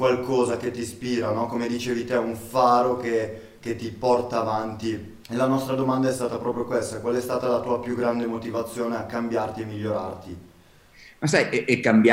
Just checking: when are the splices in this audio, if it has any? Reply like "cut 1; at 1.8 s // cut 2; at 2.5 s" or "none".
cut 1; at 5.2 s